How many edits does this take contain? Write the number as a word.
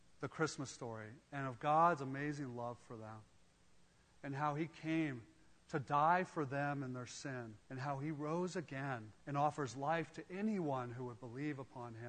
two